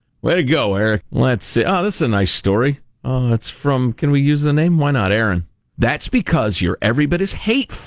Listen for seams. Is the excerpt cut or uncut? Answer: cut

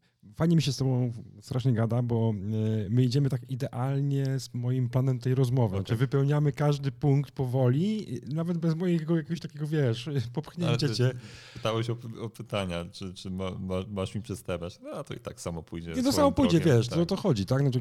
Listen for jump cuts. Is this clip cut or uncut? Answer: uncut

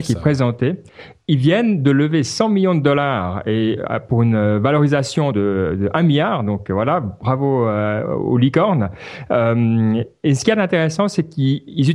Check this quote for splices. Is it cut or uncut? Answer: uncut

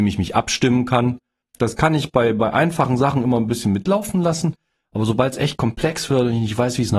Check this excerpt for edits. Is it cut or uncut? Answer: cut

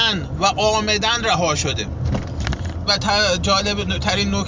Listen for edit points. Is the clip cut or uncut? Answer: cut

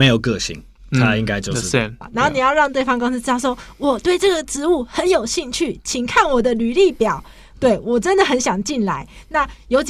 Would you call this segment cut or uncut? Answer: cut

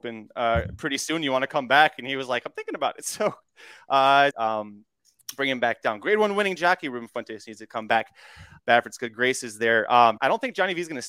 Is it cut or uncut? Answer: cut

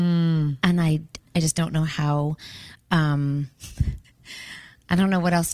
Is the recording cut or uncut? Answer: cut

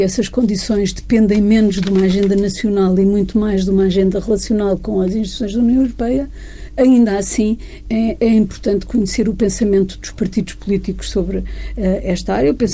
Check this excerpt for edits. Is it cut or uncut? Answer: uncut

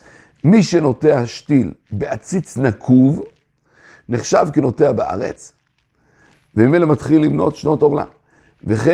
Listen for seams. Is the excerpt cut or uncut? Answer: uncut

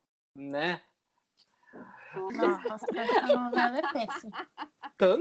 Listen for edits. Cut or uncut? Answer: cut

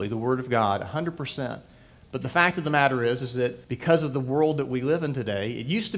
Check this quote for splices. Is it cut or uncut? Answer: cut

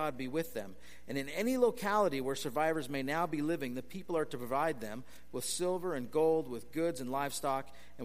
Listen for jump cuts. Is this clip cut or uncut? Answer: uncut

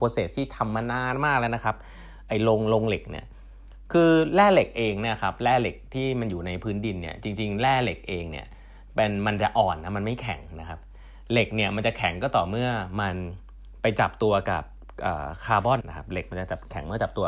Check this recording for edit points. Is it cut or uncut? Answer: cut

